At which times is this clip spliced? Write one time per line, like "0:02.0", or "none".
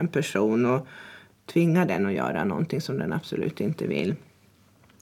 0:01.3